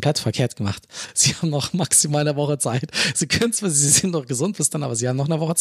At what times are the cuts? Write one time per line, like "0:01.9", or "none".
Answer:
none